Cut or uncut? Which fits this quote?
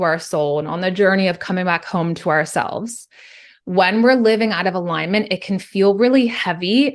uncut